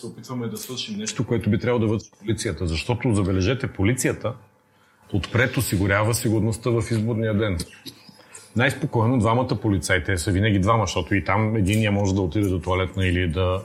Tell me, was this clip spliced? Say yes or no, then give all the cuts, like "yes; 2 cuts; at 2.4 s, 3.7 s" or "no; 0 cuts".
no; 0 cuts